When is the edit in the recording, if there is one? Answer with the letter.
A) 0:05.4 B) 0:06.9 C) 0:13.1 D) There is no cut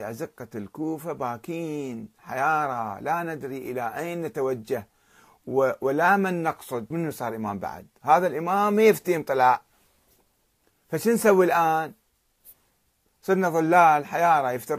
B